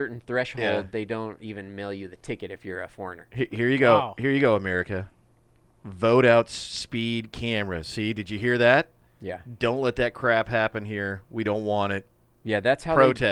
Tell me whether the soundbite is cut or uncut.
uncut